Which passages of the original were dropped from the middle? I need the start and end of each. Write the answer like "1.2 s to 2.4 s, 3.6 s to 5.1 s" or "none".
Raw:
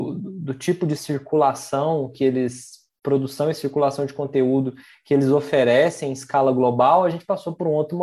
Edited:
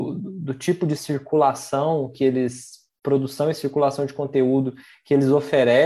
none

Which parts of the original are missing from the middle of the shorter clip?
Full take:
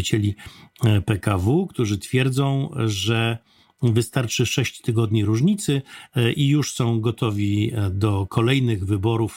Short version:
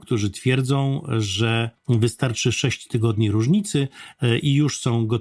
3.5 s to 3.7 s

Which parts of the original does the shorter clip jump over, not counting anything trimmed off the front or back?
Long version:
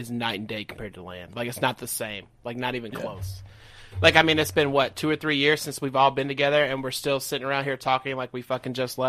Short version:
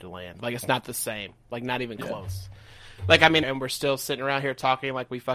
4.4 s to 6.7 s

